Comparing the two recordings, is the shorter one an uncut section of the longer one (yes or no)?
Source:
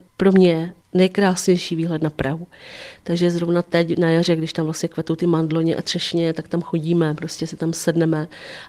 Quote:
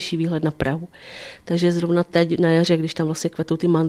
yes